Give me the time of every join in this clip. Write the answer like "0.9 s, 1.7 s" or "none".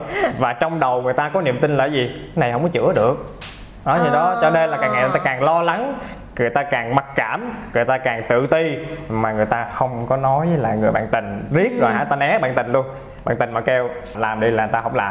14.1 s